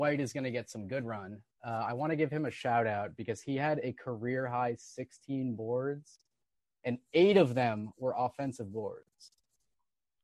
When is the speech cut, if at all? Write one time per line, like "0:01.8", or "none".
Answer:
none